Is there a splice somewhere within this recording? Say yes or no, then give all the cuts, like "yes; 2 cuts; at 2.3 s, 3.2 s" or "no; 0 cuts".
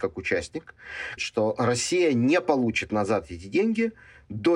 yes; 1 cut; at 1.2 s